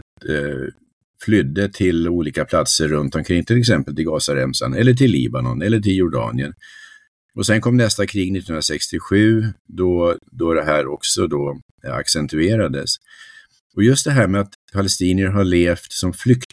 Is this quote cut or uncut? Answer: uncut